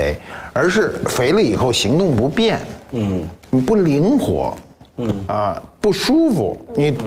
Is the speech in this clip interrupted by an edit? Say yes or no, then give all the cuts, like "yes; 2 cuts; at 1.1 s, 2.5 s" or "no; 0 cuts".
no; 0 cuts